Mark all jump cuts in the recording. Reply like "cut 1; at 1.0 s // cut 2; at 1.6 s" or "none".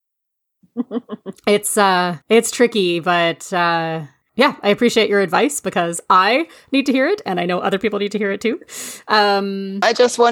cut 1; at 2.2 s